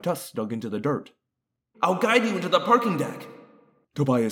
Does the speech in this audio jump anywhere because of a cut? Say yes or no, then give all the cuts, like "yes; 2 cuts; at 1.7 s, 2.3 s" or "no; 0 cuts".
yes; 1 cut; at 1.7 s